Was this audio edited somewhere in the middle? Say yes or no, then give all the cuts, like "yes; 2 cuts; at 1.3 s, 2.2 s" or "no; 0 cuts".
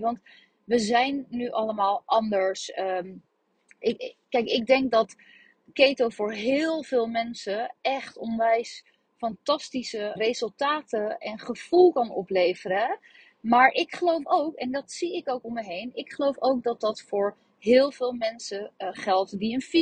yes; 2 cuts; at 3.8 s, 10.2 s